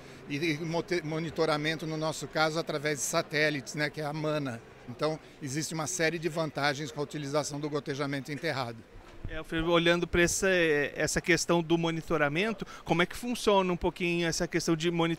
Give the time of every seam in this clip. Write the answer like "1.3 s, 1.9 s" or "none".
4.9 s